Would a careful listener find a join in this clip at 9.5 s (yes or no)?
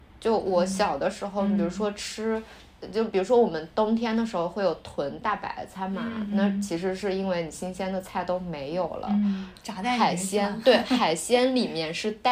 yes